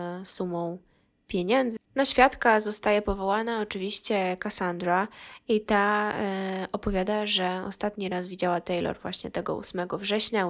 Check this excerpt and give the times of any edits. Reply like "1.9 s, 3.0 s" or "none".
1.8 s